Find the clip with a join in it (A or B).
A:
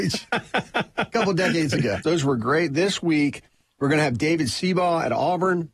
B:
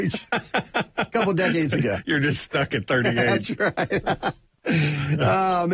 A